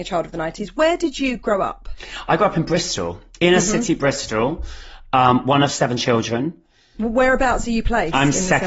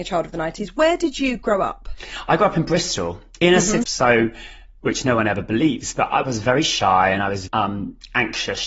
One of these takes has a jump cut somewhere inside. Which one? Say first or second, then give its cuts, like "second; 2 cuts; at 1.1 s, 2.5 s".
second; 3 cuts; at 3.8 s, 6.2 s, 7.5 s